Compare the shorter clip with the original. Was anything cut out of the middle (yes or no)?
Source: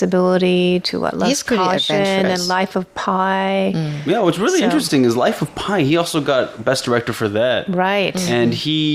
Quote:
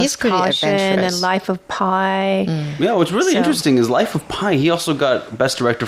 no